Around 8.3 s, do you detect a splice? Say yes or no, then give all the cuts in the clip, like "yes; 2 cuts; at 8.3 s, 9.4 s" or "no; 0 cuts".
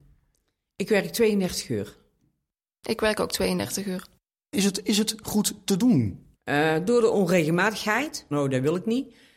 yes; 2 cuts; at 6.3 s, 8.3 s